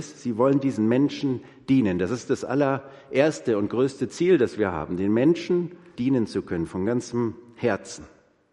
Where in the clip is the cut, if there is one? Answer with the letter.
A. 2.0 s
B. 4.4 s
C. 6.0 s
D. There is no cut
C